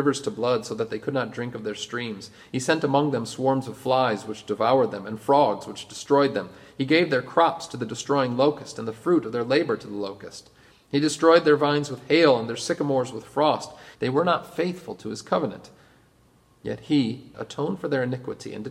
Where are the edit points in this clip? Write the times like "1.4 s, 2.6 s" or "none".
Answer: 13.9 s, 17.3 s